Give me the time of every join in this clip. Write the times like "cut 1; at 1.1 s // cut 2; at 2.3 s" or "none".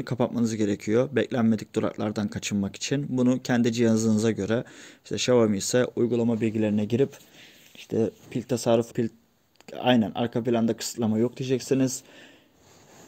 cut 1; at 8.9 s